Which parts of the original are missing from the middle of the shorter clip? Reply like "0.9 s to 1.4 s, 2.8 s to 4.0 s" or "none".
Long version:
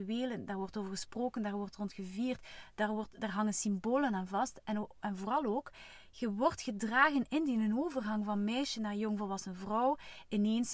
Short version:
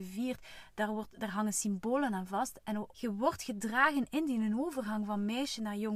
4.9 s to 6.1 s